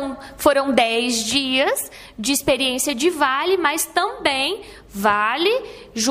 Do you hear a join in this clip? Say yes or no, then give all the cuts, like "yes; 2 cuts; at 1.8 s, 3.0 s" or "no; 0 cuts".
no; 0 cuts